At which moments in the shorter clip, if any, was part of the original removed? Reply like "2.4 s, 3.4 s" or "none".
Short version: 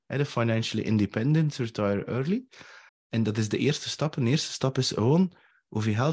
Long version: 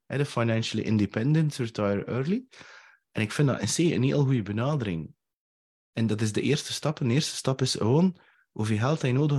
2.9 s